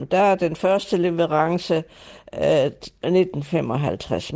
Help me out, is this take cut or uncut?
uncut